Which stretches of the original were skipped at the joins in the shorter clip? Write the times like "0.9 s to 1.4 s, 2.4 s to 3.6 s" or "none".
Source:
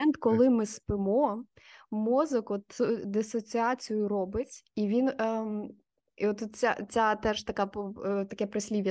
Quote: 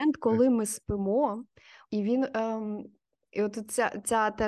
1.8 s to 4.7 s

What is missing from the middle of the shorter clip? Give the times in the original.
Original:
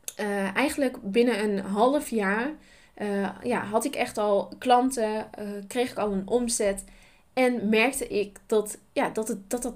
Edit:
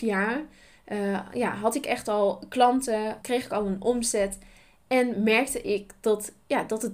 5.3 s to 5.7 s

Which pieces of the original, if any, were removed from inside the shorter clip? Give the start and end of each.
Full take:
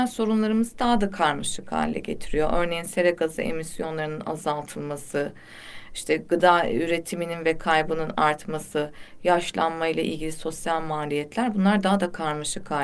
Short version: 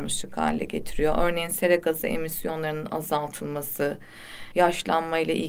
5.9 s to 9.2 s

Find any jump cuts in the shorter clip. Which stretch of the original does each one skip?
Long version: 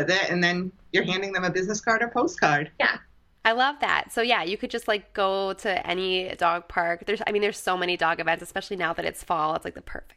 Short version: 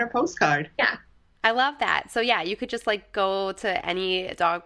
none

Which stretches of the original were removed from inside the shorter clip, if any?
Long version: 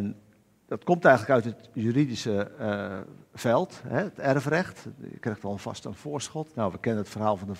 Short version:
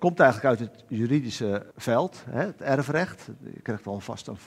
2.6 s to 3.3 s

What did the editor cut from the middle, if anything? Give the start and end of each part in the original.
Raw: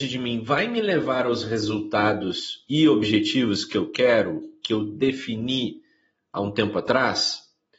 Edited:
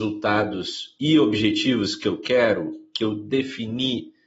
none

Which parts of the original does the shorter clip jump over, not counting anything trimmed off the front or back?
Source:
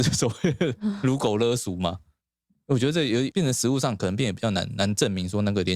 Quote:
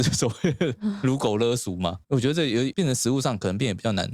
2.0 s to 2.6 s

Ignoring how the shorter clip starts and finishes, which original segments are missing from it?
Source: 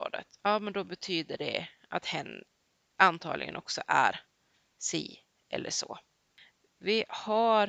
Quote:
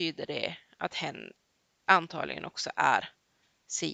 none

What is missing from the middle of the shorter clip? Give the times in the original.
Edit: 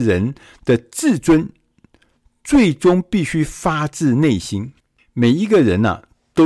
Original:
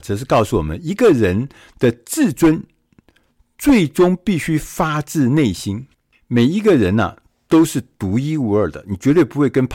none

